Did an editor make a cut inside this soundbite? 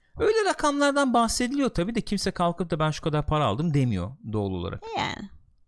no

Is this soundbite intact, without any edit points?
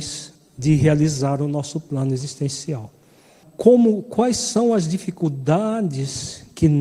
no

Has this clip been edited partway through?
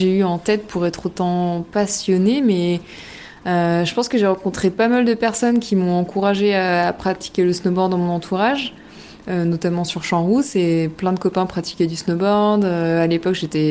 no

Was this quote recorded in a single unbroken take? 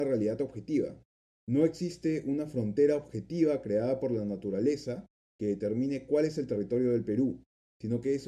no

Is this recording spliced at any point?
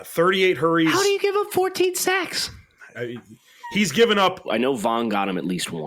yes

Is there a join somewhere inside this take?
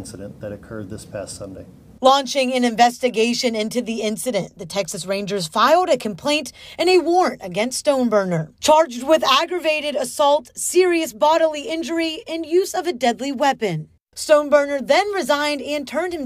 no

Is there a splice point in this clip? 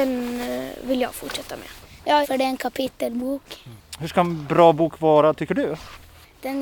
yes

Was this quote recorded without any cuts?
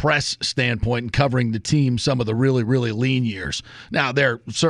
yes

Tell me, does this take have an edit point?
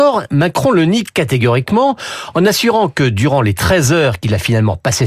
no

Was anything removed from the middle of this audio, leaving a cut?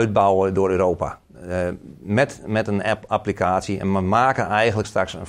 no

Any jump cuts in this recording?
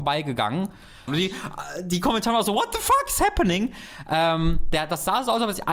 yes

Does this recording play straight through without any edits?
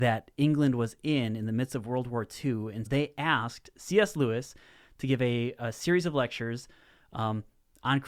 no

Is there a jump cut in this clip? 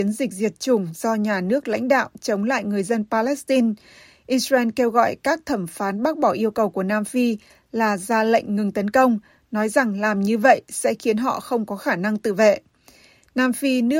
no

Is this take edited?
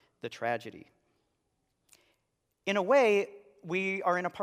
no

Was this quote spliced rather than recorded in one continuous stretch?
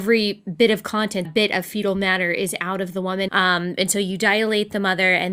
yes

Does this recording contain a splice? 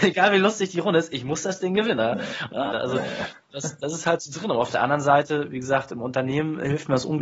yes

